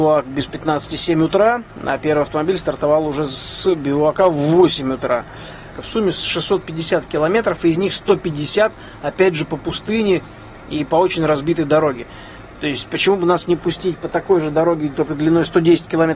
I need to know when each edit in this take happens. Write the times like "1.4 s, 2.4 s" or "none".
5.7 s